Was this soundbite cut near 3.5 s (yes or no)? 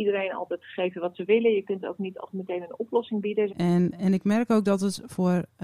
yes